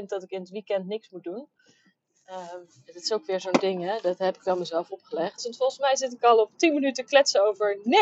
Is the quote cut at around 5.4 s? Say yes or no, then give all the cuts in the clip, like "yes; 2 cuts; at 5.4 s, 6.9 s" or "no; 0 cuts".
yes; 1 cut; at 5.4 s